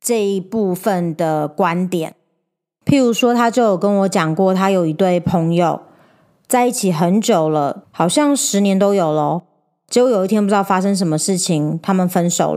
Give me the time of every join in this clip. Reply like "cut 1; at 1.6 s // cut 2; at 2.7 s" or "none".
cut 1; at 7.8 s